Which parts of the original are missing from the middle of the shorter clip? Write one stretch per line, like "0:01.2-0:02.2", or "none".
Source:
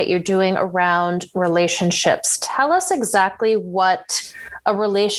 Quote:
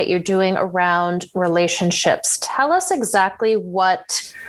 none